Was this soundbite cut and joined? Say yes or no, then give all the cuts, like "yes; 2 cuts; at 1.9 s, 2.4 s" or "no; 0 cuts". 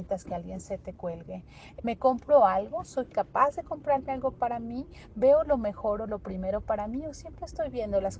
yes; 1 cut; at 1.8 s